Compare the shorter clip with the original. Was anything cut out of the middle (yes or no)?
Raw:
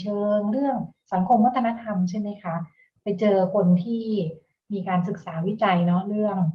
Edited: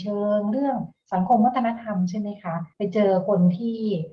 yes